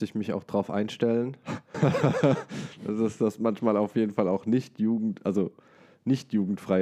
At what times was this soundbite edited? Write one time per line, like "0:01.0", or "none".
0:01.7